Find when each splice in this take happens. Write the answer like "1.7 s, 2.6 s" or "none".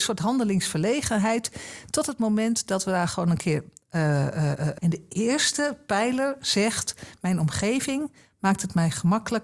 4.8 s